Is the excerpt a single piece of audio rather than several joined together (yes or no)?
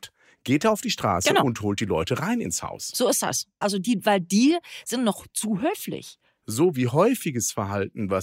no